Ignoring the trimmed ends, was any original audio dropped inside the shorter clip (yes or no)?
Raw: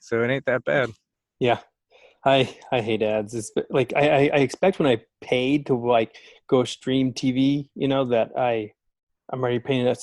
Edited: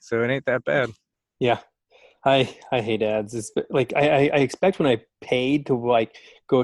no